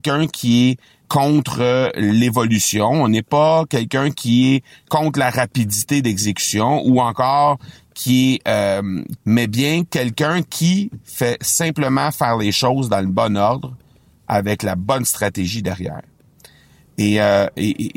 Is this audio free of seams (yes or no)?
no